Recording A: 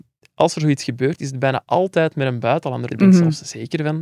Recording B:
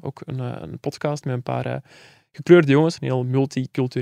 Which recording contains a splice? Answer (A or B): A